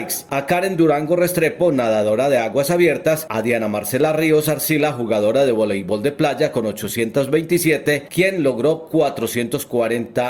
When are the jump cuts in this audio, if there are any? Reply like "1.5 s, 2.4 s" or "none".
3.3 s, 8.1 s